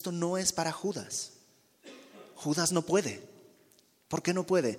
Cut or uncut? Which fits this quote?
uncut